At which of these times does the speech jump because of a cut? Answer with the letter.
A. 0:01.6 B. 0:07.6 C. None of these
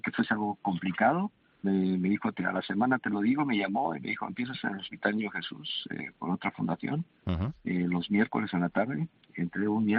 A